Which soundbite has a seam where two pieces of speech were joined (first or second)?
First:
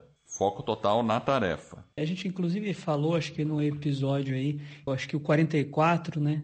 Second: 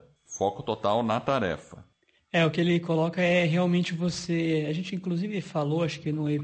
first